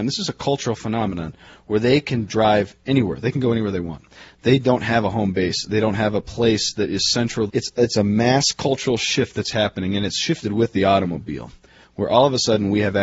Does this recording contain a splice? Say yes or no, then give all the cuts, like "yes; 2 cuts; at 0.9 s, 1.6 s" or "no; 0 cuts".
yes; 1 cut; at 7.5 s